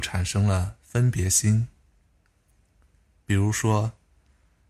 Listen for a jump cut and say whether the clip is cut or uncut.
uncut